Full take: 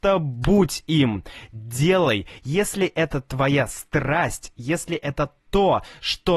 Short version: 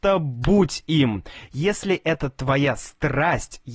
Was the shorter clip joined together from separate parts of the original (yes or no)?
yes